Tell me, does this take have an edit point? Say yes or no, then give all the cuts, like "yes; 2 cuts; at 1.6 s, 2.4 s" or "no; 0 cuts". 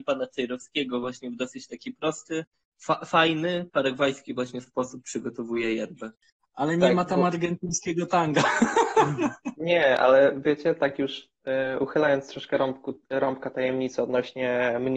no; 0 cuts